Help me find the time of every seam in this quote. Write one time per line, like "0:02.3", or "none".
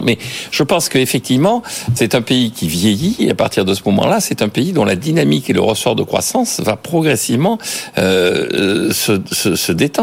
none

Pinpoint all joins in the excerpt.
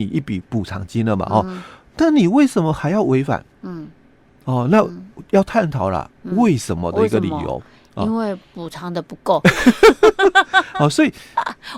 none

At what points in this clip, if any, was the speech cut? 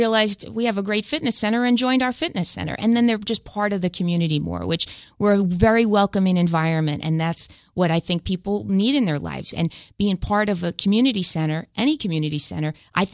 0:09.5

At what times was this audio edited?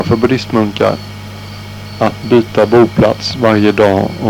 0:02.2

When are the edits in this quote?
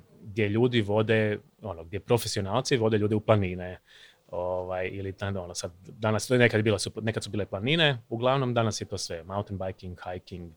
none

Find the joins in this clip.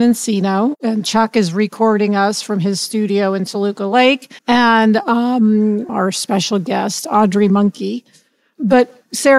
0:04.4
0:05.9

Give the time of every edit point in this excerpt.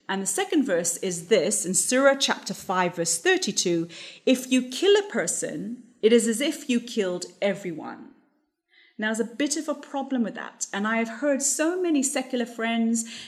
none

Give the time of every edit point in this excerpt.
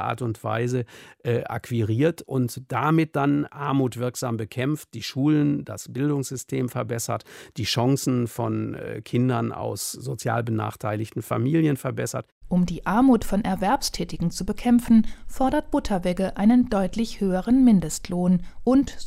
none

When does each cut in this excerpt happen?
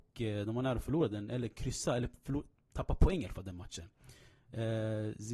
none

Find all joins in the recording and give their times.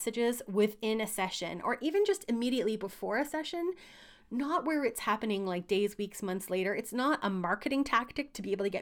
none

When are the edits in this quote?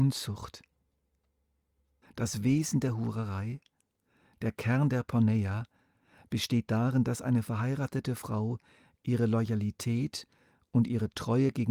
0:02.0

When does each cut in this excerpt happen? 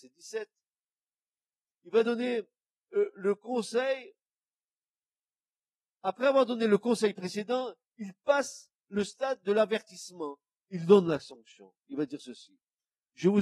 none

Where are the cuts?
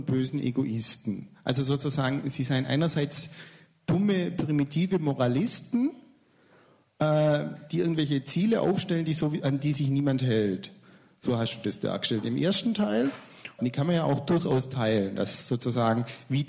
0:13.6

